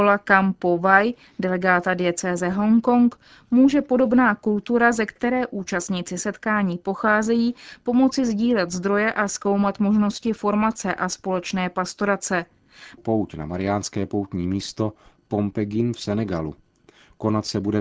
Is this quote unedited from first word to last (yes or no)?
no